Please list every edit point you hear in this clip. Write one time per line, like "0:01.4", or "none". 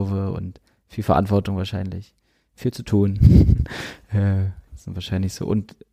0:04.7